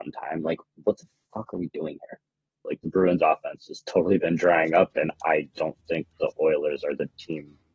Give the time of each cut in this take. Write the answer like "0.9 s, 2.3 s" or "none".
2.6 s